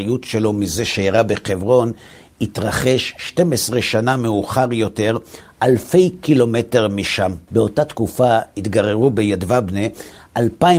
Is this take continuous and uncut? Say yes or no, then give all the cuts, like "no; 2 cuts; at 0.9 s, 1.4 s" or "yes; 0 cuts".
no; 1 cut; at 7.5 s